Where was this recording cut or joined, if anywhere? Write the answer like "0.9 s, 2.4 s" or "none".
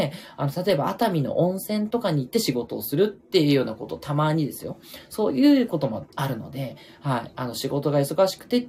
none